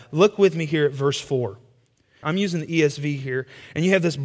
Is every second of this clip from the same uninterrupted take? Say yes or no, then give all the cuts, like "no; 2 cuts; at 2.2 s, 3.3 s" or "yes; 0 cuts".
no; 1 cut; at 2.2 s